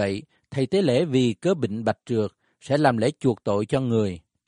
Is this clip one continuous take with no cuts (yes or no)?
yes